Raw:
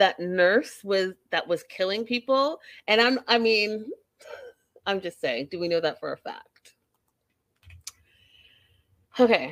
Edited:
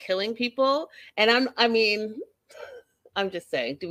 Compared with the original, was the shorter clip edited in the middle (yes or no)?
no